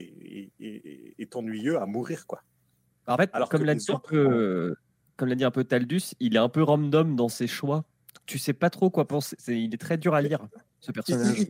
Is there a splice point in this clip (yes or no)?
no